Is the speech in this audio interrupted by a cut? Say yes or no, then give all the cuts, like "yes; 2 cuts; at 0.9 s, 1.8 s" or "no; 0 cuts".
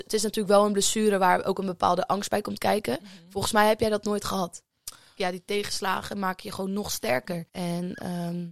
yes; 2 cuts; at 5.2 s, 7.5 s